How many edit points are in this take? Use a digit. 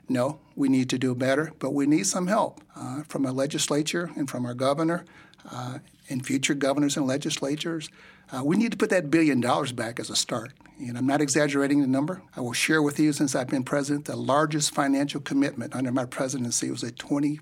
2